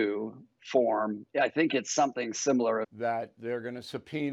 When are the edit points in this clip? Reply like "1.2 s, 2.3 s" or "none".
2.8 s